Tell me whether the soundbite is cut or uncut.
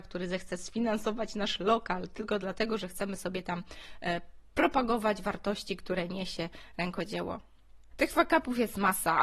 cut